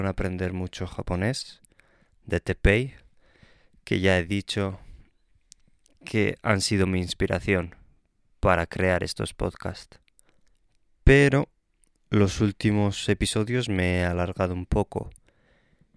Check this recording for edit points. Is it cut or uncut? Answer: uncut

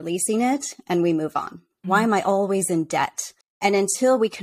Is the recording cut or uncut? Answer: cut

